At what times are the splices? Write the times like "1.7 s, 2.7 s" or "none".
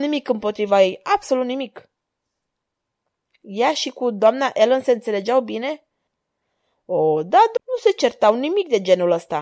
7.6 s